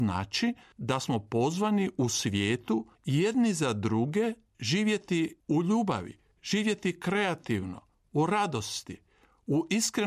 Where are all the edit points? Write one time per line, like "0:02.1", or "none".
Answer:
none